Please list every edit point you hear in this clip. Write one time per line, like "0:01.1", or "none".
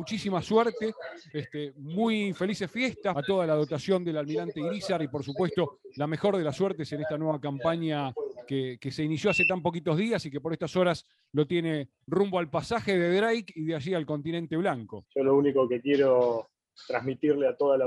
0:15.0